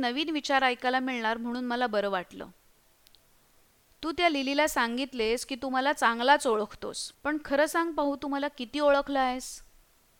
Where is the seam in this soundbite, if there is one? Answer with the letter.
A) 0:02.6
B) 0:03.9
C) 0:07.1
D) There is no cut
C